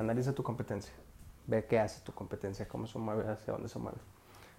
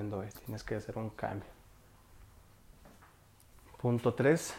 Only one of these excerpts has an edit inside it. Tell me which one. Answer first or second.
first